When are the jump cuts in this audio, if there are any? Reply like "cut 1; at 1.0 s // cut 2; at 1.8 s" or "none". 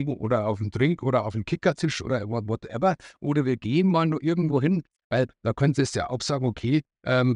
none